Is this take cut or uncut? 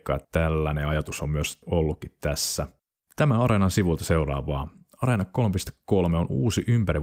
uncut